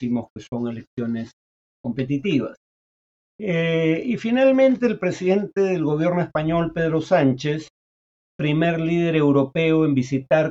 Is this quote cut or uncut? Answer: uncut